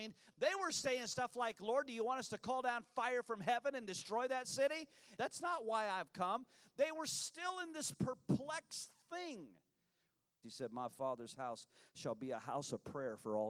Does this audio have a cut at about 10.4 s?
yes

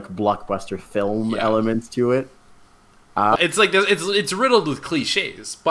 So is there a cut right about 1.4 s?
no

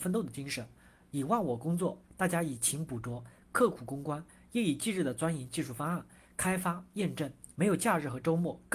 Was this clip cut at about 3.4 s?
no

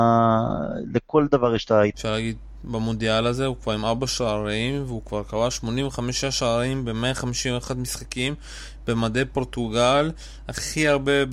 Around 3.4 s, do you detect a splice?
no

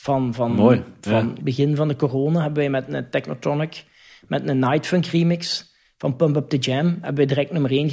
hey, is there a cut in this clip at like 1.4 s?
yes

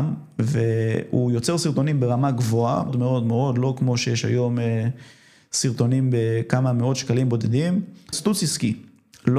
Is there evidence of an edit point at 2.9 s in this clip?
yes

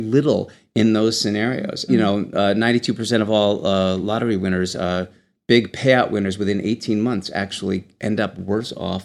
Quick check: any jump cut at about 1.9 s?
yes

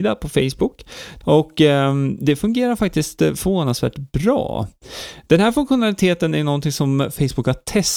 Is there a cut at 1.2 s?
yes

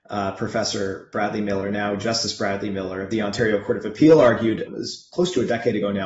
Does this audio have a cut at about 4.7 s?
yes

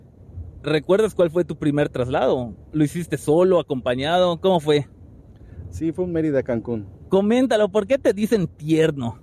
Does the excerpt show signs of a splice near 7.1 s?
yes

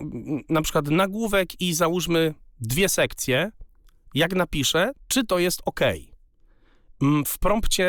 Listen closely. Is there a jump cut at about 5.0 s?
yes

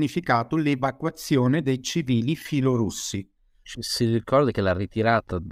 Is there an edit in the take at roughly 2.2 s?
no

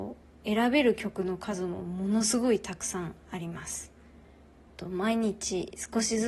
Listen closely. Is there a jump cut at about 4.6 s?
yes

